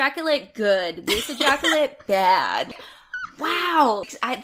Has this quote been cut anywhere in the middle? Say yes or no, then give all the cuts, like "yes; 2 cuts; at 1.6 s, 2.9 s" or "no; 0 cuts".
no; 0 cuts